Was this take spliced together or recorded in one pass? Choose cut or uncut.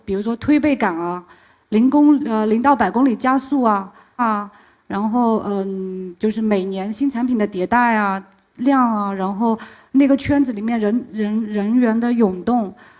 cut